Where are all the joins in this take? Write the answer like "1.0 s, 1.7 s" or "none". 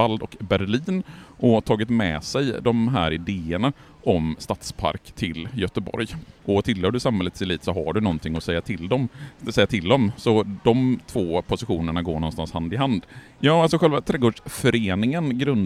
6.4 s, 13.4 s